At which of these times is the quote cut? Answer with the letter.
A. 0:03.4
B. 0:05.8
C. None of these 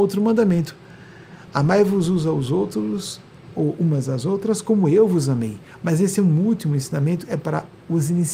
B